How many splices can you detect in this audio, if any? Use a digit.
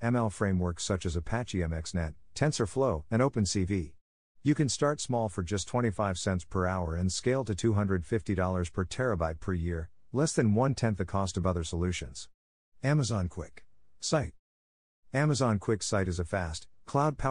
1